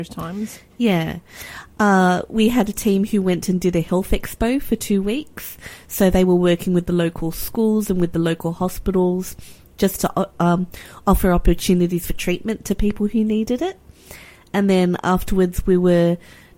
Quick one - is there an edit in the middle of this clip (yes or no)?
no